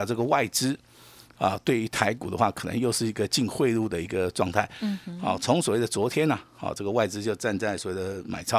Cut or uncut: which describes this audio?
uncut